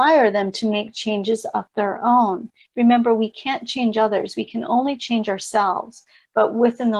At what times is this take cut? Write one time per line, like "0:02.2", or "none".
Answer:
none